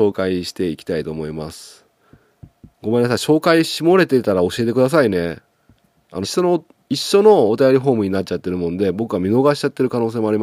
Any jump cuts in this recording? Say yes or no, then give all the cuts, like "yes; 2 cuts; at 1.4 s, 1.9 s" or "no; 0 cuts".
yes; 1 cut; at 6.2 s